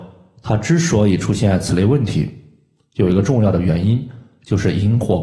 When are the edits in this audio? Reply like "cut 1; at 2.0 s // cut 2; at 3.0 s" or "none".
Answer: none